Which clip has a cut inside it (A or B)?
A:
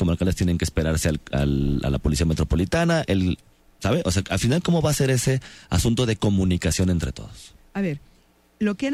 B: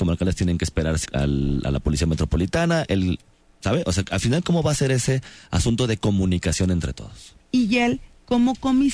B